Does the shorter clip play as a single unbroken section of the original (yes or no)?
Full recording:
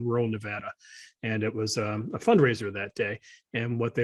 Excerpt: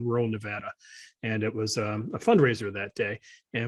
yes